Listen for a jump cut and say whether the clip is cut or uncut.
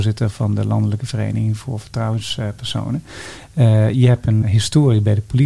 cut